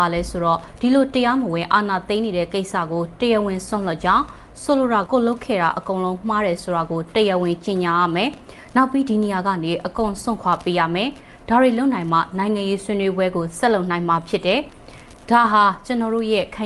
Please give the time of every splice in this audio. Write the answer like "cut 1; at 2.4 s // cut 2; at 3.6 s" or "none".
cut 1; at 5.1 s